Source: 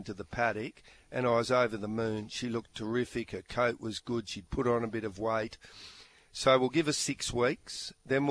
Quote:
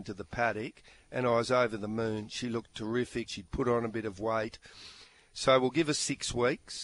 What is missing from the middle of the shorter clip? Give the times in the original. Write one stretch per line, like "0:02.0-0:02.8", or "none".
0:03.3-0:04.2